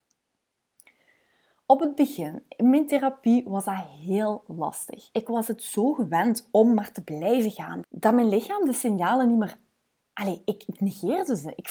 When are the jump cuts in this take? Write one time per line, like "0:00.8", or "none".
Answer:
0:07.8